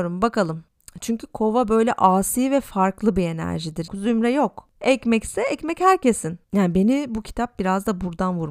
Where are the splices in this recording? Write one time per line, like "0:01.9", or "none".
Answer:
0:03.9